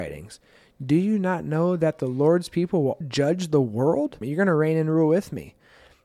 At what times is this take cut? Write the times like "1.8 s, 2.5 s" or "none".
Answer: 3.0 s, 4.2 s